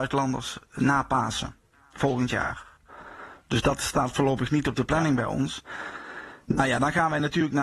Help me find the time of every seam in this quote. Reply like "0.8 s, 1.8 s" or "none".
none